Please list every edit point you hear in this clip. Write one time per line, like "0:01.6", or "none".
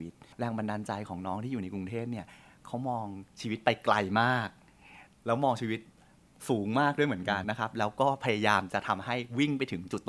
0:07.4